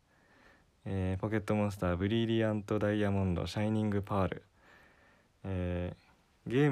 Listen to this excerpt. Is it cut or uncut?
uncut